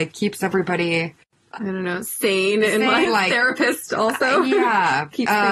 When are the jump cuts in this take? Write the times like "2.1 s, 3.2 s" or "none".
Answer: 3.1 s